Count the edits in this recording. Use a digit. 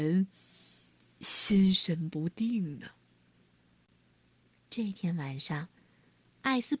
0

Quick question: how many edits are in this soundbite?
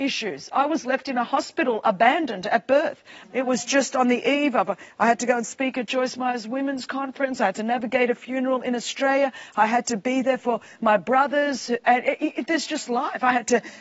1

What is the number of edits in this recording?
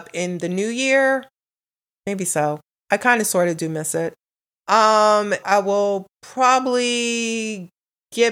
2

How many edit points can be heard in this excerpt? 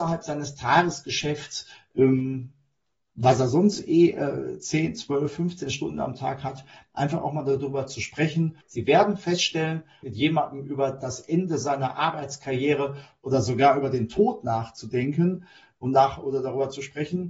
2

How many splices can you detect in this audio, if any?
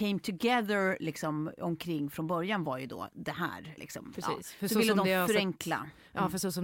1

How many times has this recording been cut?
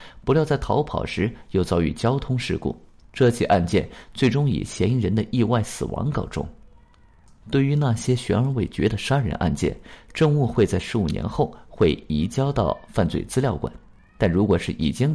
0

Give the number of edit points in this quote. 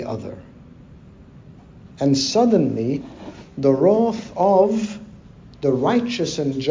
0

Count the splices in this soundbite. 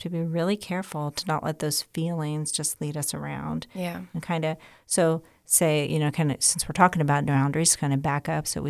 0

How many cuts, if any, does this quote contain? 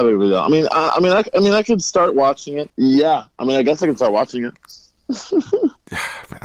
1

